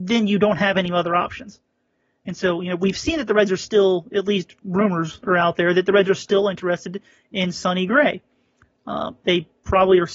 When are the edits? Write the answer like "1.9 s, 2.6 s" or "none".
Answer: none